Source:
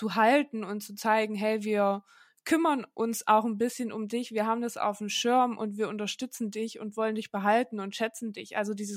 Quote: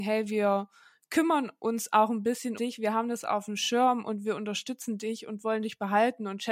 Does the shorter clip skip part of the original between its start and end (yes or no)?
yes